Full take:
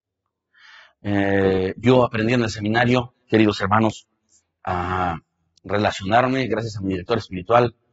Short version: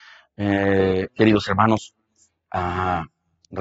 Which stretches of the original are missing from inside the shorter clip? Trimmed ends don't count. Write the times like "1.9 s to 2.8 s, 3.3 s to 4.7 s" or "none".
1.7 s to 3.2 s